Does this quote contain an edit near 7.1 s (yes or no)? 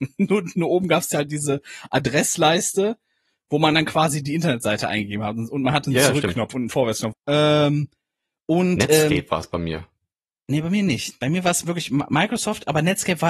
yes